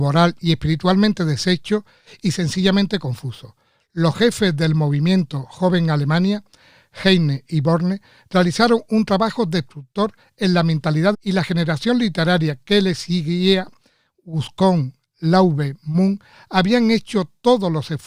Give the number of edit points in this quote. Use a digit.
1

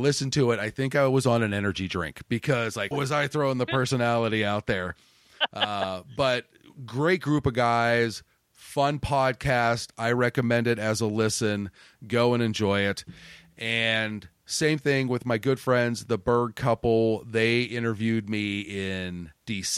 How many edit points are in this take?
1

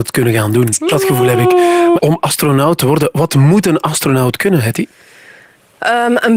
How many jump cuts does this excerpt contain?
1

